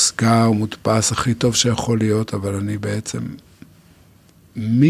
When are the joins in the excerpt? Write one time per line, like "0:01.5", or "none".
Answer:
none